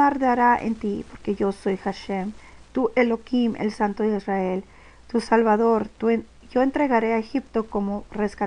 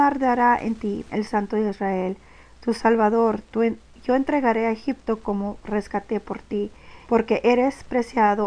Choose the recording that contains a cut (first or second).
second